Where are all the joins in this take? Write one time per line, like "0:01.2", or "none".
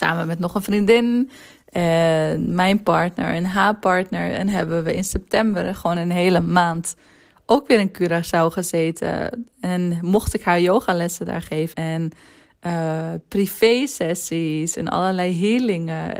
0:11.7